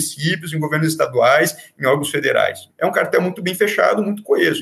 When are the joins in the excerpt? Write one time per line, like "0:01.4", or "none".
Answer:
0:02.7